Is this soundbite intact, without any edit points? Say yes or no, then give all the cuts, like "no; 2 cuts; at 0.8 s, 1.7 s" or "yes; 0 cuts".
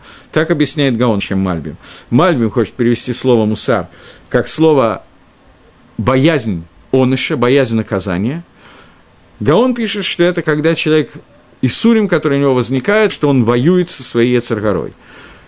no; 2 cuts; at 1.2 s, 13.1 s